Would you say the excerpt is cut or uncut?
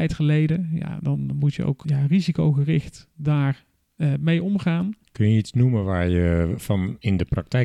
cut